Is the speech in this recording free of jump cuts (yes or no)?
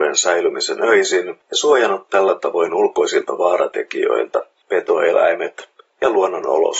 no